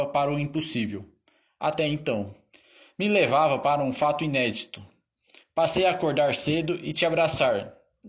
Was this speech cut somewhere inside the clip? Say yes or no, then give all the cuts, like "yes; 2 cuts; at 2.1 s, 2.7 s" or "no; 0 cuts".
no; 0 cuts